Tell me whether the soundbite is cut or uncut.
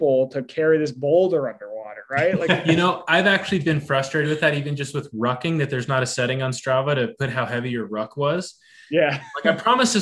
uncut